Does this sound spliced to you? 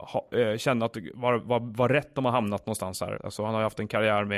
yes; 1 cut; at 3.2 s

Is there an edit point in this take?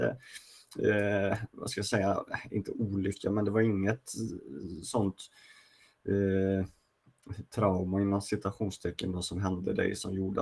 no; 0 cuts

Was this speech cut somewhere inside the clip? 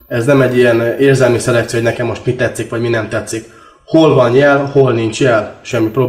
no; 0 cuts

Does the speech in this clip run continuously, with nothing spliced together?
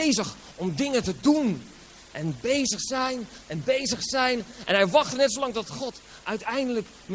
yes; 0 cuts

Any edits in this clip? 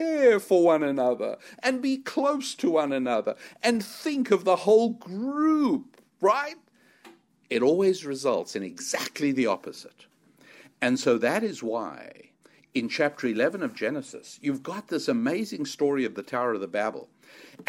no; 0 cuts

